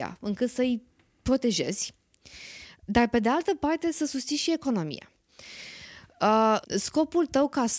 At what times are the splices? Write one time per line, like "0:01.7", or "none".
0:05.3
0:06.6